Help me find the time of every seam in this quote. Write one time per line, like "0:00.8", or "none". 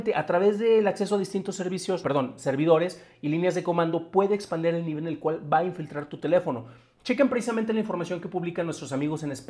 0:02.0
0:07.0